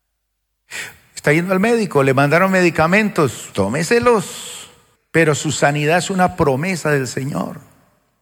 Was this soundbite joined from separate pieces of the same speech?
yes; 2 cuts; at 3.5 s, 5.0 s

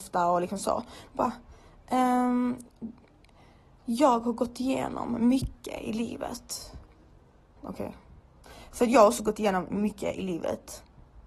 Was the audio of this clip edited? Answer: yes; 1 cut; at 7.6 s

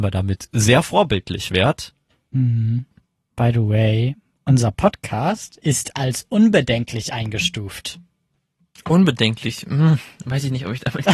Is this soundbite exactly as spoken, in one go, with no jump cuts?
yes; 0 cuts

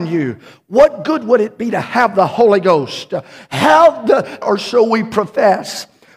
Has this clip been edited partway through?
yes; 1 cut; at 4.4 s

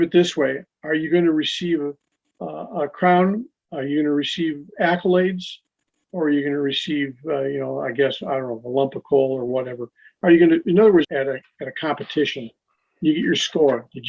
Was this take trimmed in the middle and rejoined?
yes; 1 cut; at 11.0 s

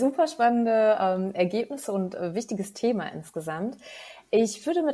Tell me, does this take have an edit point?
no; 0 cuts

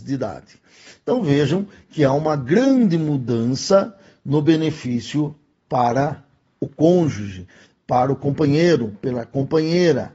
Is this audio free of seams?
yes; 0 cuts

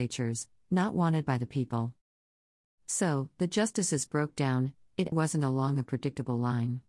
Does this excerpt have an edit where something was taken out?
yes; 2 cuts; at 2.6 s, 5.1 s

